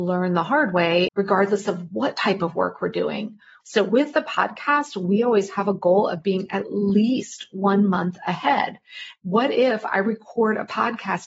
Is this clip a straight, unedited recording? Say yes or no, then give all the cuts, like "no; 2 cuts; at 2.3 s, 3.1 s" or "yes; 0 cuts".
no; 3 cuts; at 1.1 s, 3.6 s, 9.2 s